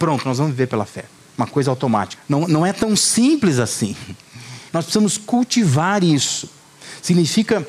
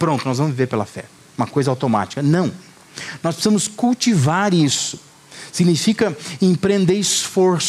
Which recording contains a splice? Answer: first; 2 cuts; at 2.2 s, 4.7 s

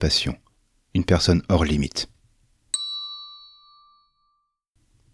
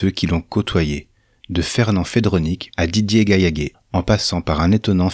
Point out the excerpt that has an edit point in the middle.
second; 2 cuts; at 2.7 s, 3.7 s

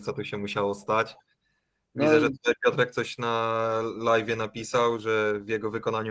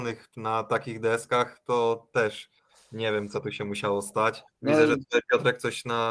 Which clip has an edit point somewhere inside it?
second; 1 cut; at 4.5 s

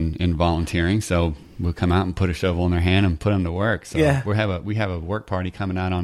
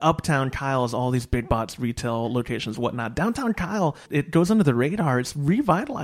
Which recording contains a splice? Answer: second; 1 cut; at 4.1 s

